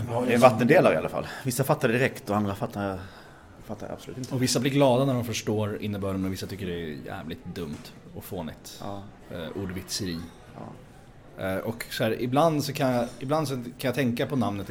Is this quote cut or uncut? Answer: cut